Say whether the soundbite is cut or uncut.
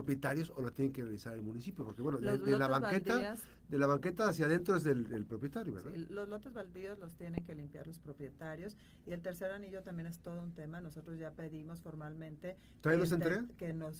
uncut